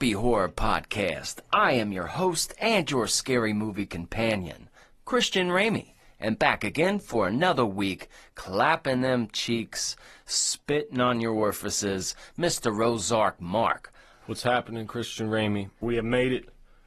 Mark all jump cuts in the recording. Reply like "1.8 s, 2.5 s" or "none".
14.1 s, 15.8 s